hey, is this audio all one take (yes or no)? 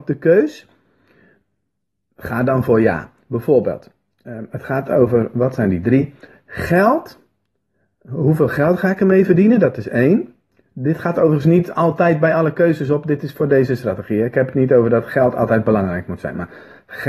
yes